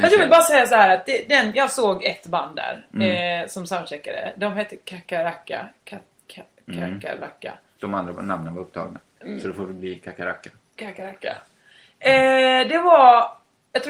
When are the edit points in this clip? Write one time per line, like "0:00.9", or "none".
none